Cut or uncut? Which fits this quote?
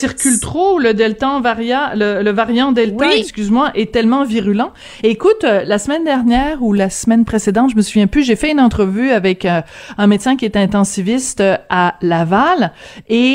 uncut